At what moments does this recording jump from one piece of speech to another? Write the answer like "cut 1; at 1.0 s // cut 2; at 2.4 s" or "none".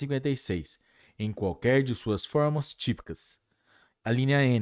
none